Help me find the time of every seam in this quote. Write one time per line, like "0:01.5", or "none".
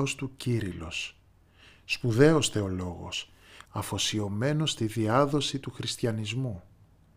0:03.6